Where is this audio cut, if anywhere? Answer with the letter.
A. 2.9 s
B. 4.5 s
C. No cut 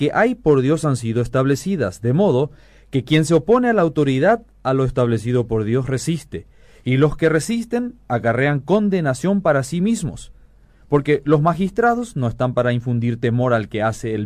C